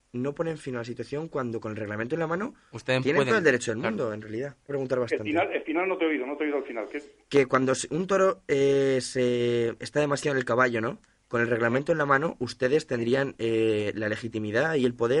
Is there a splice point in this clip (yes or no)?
yes